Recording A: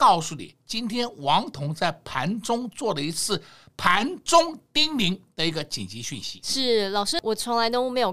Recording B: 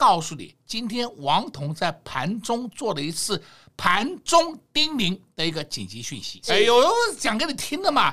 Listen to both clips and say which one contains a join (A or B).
B